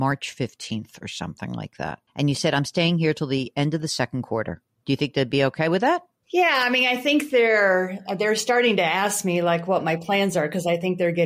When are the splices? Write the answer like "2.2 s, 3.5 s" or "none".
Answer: 4.8 s